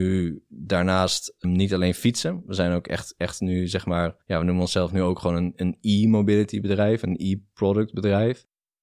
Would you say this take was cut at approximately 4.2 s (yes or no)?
yes